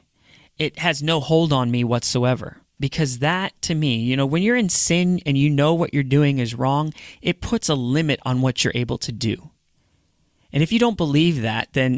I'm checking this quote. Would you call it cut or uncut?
cut